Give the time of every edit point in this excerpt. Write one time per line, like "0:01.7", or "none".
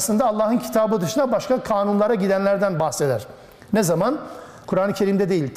0:04.6